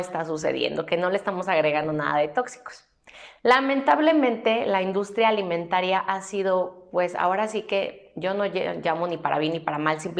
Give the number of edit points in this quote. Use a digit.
0